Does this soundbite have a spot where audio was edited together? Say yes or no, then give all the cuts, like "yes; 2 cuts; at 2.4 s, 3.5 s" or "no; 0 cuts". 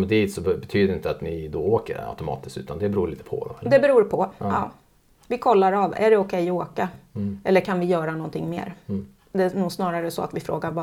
no; 0 cuts